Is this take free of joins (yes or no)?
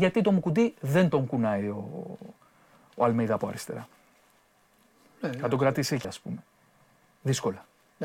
no